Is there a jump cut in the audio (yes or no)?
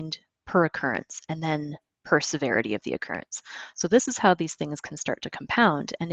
no